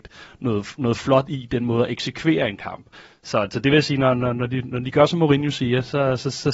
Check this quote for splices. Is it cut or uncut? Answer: uncut